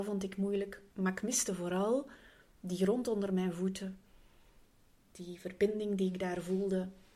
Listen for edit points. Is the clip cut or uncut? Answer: cut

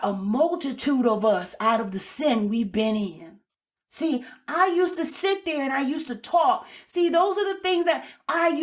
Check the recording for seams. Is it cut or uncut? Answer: uncut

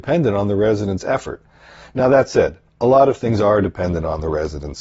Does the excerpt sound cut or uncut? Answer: uncut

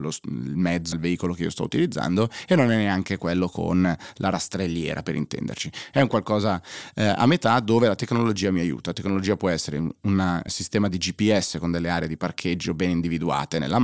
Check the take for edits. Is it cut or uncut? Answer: cut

